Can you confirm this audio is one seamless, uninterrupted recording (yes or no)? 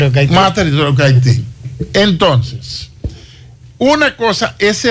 yes